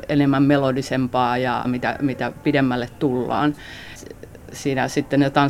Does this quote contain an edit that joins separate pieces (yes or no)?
yes